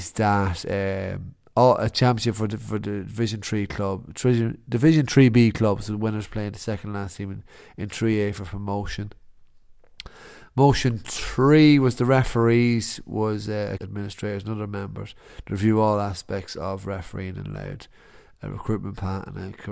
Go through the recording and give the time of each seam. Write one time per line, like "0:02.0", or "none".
0:13.8